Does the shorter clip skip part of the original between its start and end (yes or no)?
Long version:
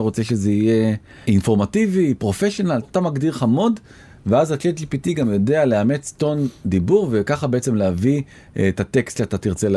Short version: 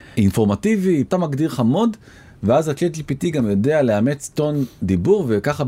yes